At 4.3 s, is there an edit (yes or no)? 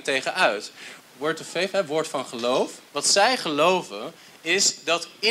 no